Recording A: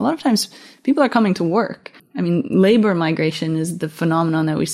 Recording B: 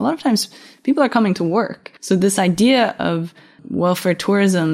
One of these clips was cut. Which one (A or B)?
B